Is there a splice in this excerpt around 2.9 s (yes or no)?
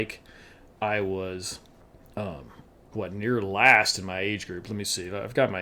yes